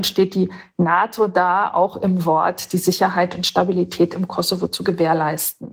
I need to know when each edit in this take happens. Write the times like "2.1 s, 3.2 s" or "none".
none